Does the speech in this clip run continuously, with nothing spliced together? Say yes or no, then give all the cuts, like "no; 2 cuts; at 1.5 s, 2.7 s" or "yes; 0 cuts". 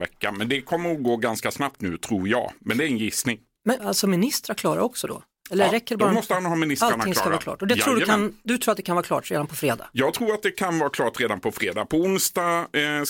no; 1 cut; at 3.8 s